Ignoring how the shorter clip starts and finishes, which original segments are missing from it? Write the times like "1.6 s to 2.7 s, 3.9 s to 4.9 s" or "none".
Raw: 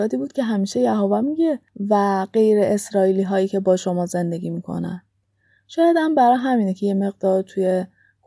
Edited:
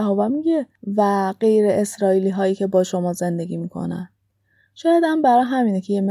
none